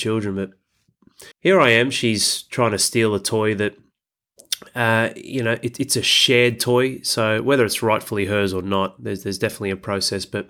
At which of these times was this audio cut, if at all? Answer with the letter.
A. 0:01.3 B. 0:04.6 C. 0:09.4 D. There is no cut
A